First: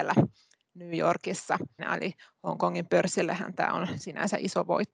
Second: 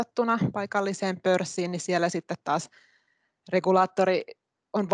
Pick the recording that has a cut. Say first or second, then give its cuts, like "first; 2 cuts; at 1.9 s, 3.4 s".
first; 1 cut; at 1.8 s